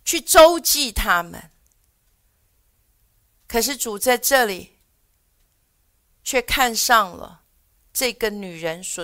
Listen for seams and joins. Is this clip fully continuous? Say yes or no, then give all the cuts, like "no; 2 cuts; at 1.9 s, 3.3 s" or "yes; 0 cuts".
yes; 0 cuts